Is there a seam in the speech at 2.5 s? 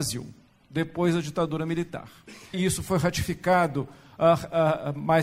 yes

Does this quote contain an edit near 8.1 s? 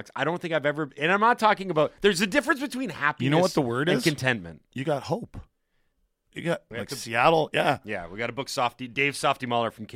no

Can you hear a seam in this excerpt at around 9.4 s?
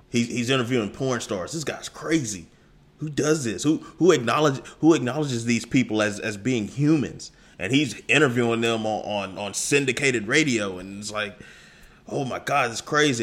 no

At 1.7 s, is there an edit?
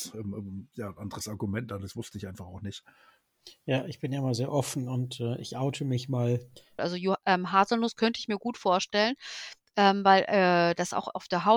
no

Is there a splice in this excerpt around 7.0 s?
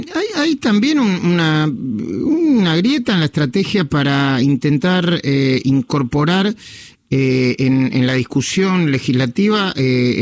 no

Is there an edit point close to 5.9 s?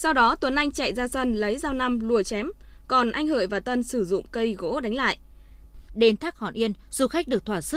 yes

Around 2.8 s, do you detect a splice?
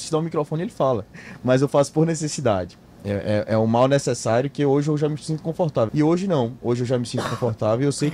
no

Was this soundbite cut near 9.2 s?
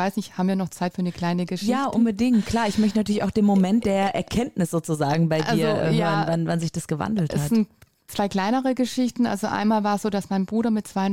no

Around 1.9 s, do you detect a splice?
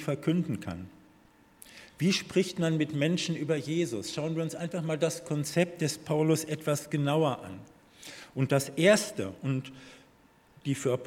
yes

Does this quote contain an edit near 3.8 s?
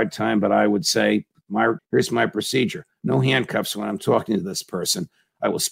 no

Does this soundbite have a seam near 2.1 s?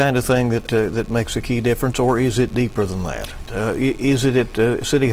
no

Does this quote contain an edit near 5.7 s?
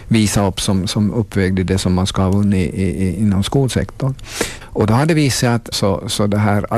yes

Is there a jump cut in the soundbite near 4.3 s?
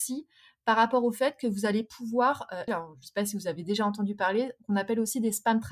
no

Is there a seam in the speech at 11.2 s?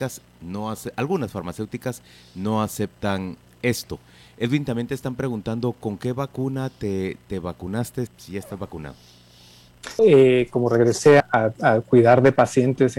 yes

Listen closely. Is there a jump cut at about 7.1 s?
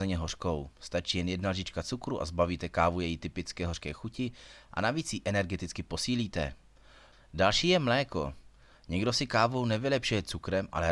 yes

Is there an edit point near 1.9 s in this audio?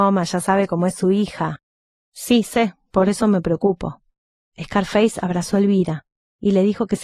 no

